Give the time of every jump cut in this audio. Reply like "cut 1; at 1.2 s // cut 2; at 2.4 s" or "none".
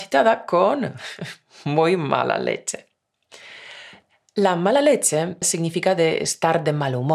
cut 1; at 5.4 s